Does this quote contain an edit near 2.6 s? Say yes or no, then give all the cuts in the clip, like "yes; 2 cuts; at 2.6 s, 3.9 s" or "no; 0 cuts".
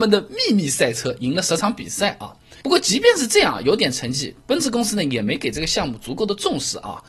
no; 0 cuts